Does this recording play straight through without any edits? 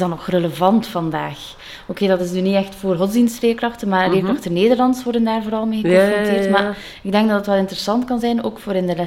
yes; 0 cuts

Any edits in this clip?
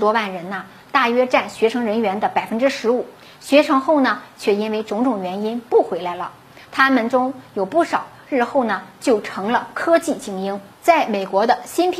no; 0 cuts

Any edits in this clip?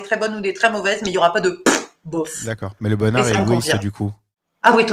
no; 0 cuts

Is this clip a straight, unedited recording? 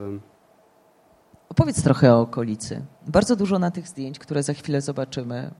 yes; 0 cuts

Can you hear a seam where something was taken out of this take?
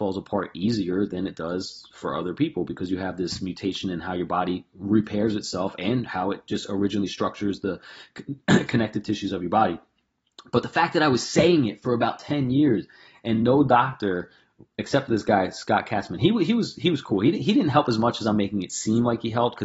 no; 0 cuts

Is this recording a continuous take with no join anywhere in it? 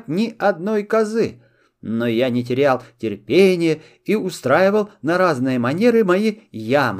yes; 0 cuts

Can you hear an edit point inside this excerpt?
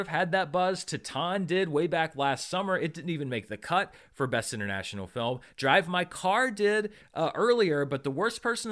no; 0 cuts

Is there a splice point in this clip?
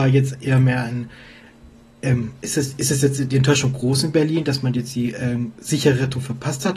no; 0 cuts

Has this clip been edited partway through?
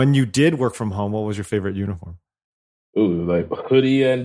no; 0 cuts

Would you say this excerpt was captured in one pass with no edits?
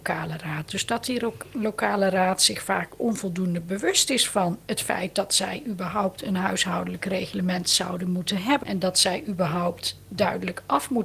no; 1 cut; at 8.6 s

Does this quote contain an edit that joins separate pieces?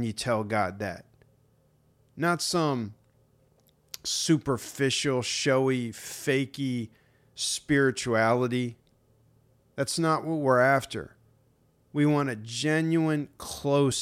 no; 0 cuts

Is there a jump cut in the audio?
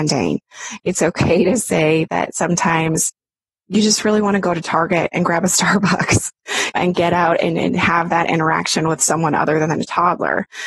yes; 1 cut; at 6.7 s

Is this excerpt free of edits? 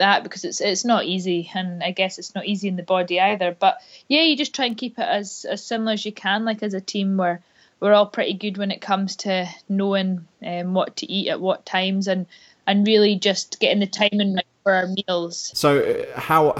yes; 0 cuts

